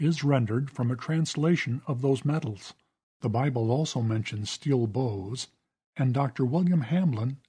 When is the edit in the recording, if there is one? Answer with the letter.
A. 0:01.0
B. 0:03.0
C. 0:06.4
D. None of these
B